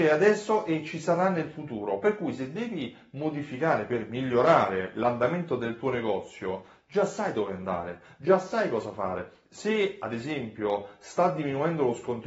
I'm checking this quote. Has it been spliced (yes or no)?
no